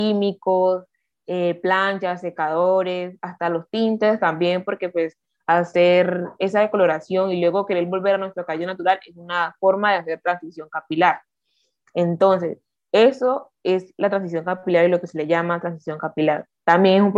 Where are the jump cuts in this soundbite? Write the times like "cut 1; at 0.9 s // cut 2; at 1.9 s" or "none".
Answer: none